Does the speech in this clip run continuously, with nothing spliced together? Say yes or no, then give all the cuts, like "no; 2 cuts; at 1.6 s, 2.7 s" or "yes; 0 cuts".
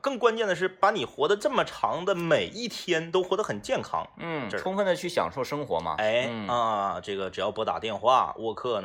no; 1 cut; at 4.5 s